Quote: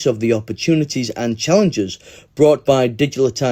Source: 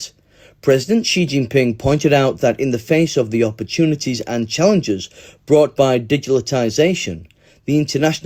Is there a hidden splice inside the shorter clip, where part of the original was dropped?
no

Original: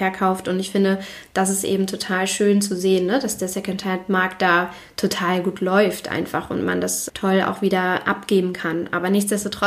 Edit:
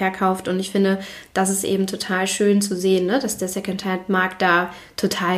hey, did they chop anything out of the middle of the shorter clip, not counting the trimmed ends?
no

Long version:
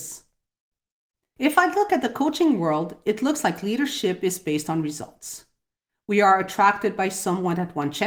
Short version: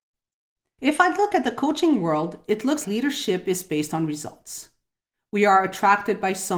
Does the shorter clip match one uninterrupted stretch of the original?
no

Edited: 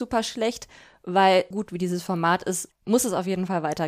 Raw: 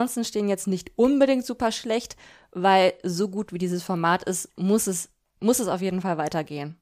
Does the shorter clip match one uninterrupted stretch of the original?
no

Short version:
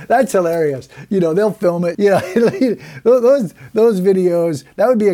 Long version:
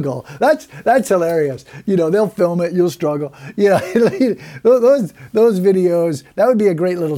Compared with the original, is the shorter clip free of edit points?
no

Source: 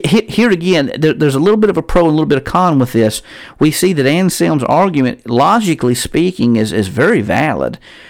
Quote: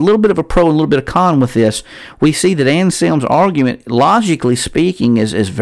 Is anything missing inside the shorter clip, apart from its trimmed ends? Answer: no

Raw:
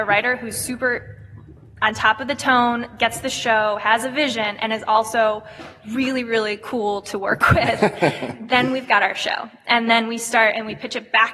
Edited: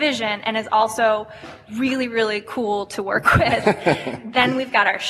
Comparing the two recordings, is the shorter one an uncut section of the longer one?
yes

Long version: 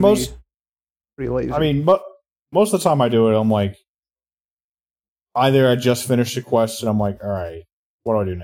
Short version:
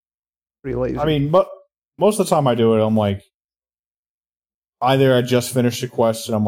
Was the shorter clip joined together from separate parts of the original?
no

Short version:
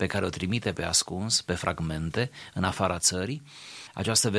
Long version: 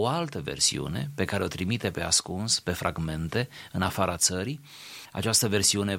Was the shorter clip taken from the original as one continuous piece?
yes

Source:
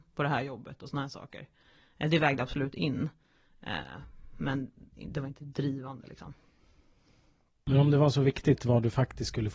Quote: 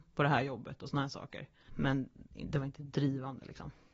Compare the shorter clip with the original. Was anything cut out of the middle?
yes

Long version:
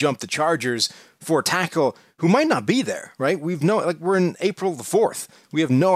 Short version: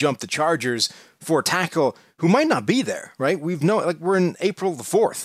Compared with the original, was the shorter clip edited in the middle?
no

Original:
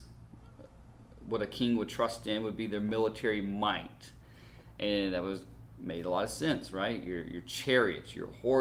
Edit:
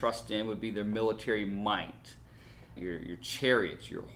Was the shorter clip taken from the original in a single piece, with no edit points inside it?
no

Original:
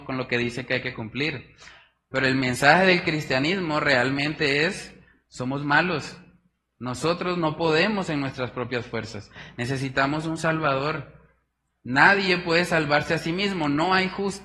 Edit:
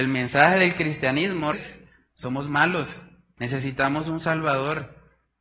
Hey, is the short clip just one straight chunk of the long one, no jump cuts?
no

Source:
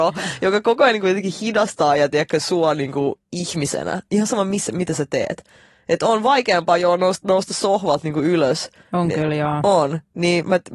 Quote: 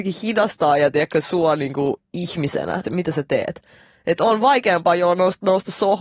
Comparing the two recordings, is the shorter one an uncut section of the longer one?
no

